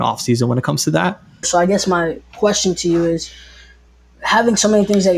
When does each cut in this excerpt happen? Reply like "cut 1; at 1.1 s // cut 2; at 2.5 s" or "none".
cut 1; at 1.4 s